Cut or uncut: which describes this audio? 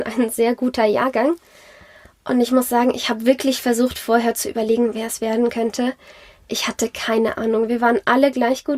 uncut